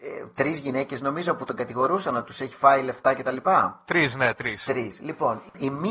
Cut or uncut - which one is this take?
uncut